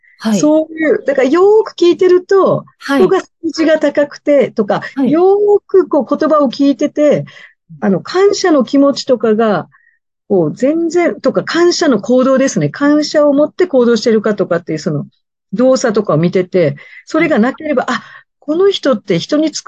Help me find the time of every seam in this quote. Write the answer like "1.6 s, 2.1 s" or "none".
4.9 s